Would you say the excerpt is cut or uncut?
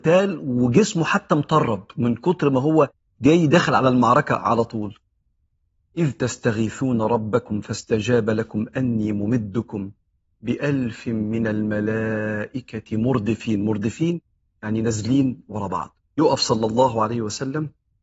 cut